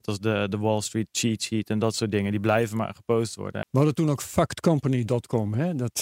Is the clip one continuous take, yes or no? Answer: no